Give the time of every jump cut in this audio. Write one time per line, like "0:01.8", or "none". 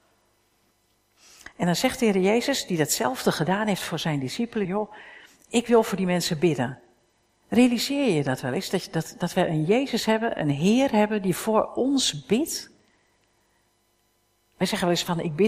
0:04.6